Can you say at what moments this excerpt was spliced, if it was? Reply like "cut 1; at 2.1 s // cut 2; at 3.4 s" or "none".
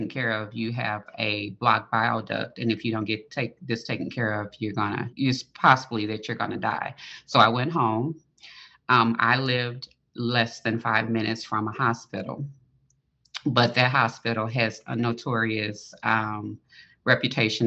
cut 1; at 5.1 s

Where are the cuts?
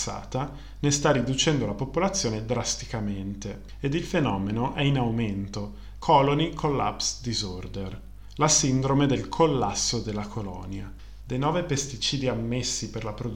cut 1; at 6.0 s // cut 2; at 11.2 s

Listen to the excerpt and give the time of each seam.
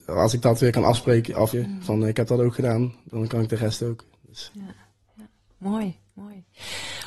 cut 1; at 1.5 s

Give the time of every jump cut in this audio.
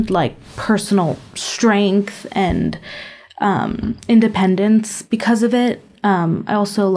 none

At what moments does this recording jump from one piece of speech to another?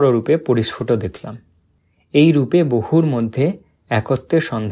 none

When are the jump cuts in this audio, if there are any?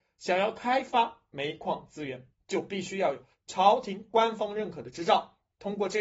none

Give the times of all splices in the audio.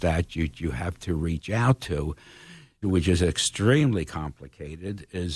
cut 1; at 2.8 s

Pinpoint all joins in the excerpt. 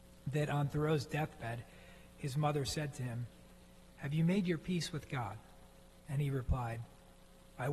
none

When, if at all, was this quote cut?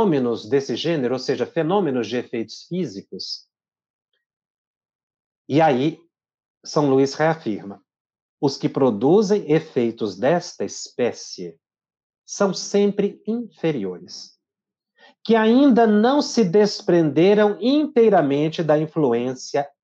none

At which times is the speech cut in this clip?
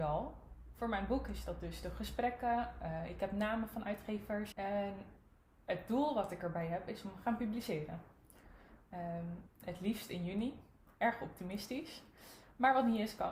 cut 1; at 4.5 s

